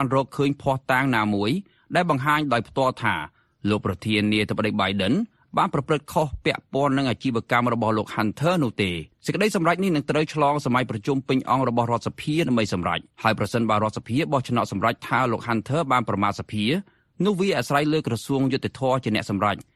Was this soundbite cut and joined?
yes; 2 cuts; at 9.1 s, 13.1 s

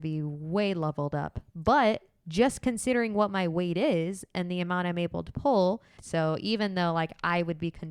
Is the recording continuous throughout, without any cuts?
no; 1 cut; at 6.0 s

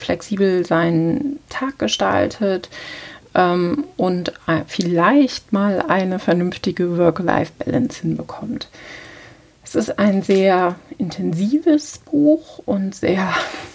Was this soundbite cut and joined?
no; 0 cuts

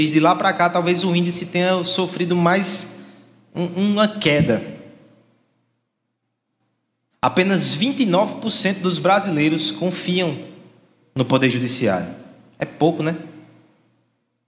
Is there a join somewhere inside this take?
yes; 1 cut; at 7.1 s

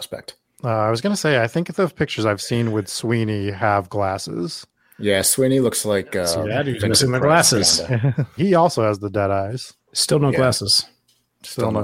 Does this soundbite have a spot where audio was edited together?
yes; 1 cut; at 8.4 s

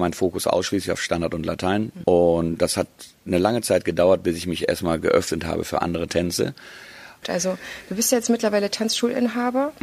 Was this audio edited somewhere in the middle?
yes; 2 cuts; at 2.0 s, 7.2 s

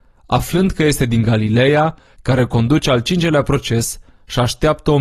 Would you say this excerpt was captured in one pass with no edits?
no; 1 cut; at 2.1 s

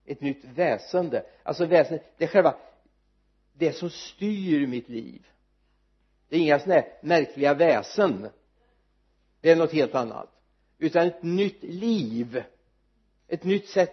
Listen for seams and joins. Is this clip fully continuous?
yes; 0 cuts

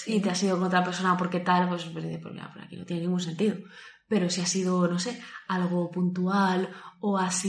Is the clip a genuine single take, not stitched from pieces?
yes; 0 cuts

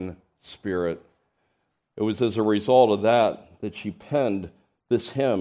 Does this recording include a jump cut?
no; 0 cuts

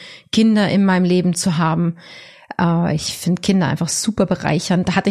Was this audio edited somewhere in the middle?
no; 0 cuts

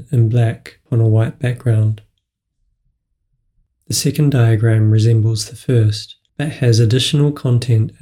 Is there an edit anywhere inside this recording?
no; 0 cuts

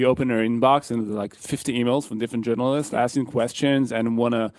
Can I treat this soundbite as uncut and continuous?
yes; 0 cuts

